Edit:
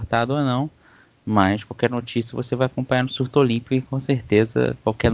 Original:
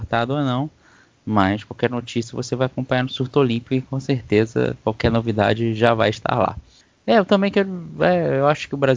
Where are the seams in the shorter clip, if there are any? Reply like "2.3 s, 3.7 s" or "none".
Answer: none